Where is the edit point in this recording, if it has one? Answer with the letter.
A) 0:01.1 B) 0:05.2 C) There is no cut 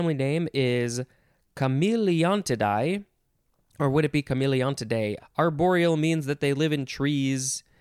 B